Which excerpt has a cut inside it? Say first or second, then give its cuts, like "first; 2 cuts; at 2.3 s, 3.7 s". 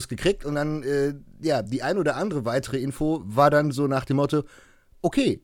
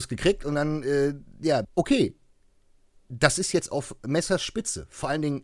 second; 1 cut; at 1.6 s